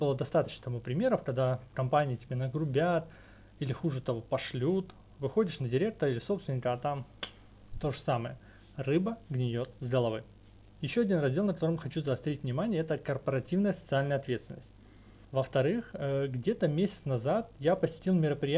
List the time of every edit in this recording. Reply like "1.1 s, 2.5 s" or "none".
15.2 s